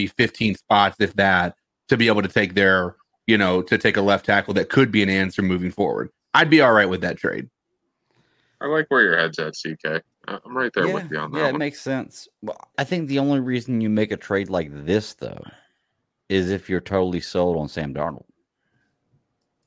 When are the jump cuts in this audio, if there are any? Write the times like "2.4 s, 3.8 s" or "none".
12.7 s

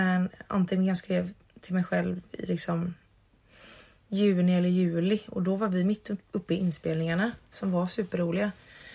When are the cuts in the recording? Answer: none

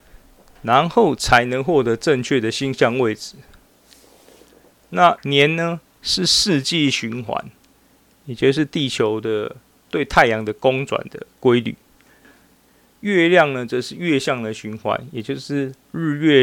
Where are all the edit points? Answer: none

